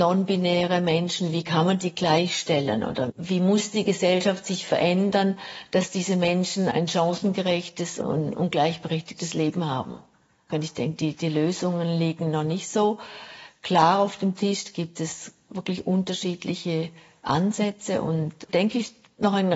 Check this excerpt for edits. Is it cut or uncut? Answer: cut